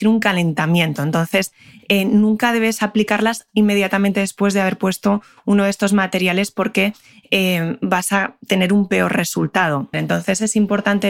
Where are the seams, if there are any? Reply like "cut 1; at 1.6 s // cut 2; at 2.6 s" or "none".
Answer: cut 1; at 9.9 s